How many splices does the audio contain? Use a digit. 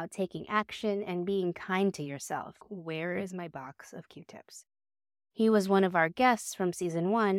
2